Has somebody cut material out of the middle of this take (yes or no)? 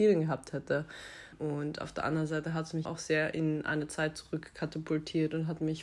yes